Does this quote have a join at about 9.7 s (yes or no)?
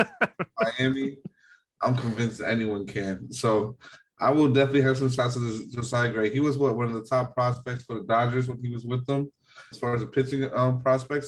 yes